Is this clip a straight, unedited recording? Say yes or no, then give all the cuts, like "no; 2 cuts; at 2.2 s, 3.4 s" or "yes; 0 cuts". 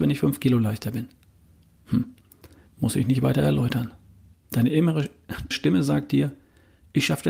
no; 3 cuts; at 2.7 s, 4.3 s, 5.5 s